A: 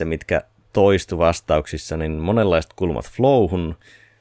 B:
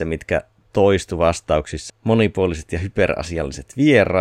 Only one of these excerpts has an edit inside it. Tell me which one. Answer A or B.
B